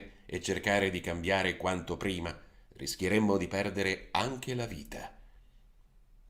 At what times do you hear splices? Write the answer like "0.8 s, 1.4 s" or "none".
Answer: 2.6 s